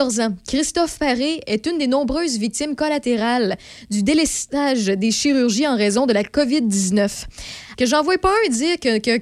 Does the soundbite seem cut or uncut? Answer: cut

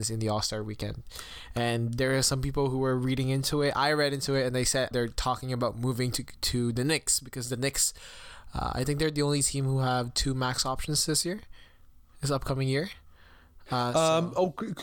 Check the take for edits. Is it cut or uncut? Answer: cut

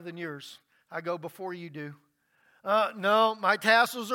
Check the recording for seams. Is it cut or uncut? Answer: uncut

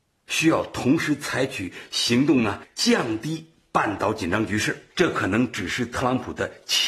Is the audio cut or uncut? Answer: cut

